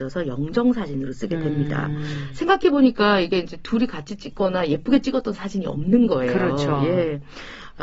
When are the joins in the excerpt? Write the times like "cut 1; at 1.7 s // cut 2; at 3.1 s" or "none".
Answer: none